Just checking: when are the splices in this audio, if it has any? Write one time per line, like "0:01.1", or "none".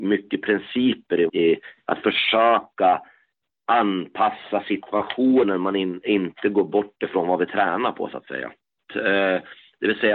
0:01.3
0:08.9